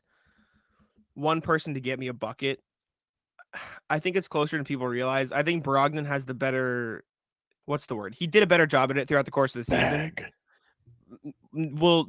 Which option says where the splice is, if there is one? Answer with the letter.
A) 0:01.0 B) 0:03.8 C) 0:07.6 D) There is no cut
C